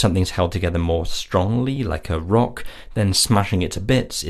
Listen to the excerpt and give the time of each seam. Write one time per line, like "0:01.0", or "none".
none